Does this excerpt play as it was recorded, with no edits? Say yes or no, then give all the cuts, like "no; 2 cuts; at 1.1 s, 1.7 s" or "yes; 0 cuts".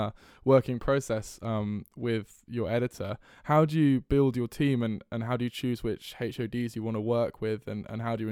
yes; 0 cuts